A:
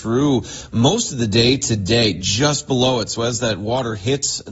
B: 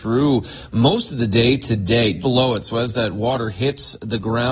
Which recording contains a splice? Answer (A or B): B